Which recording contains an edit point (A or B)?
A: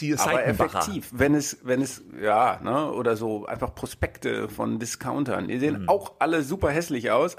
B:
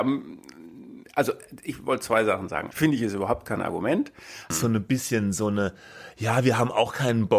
B